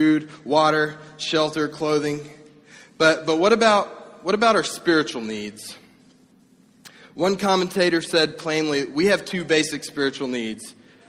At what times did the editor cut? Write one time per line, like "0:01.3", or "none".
none